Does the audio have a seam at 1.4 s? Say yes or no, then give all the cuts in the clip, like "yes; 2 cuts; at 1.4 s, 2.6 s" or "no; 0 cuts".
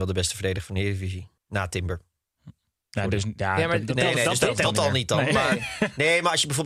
yes; 1 cut; at 1.4 s